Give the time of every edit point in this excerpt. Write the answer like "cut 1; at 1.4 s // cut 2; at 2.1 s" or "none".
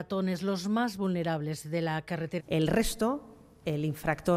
cut 1; at 2.4 s